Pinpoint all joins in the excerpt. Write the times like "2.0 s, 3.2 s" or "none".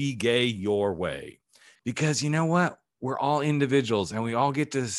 1.8 s